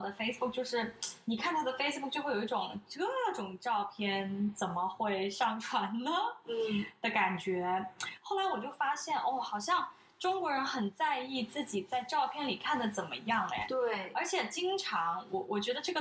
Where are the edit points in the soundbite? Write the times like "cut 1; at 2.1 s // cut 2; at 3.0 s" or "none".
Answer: none

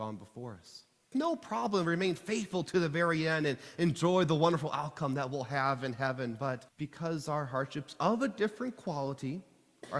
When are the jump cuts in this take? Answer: cut 1; at 1.1 s // cut 2; at 6.7 s

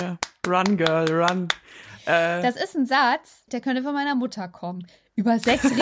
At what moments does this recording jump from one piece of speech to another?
cut 1; at 3.5 s

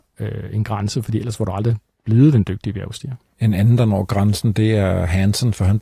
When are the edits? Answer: none

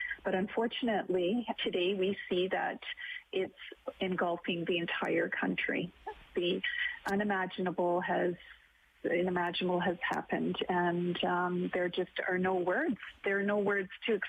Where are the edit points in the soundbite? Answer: cut 1; at 1.5 s // cut 2; at 6.3 s

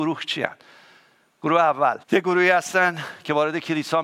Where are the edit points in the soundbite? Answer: cut 1; at 2.0 s

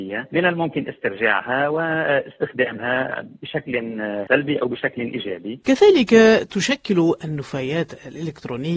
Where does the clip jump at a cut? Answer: cut 1; at 5.6 s

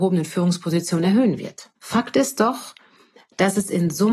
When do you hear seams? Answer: cut 1; at 1.8 s

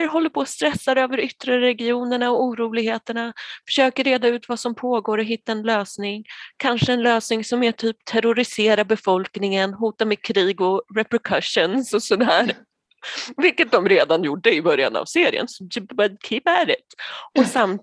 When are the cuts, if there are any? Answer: cut 1; at 16.2 s

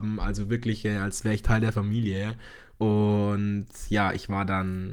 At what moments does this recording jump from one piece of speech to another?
cut 1; at 2.8 s

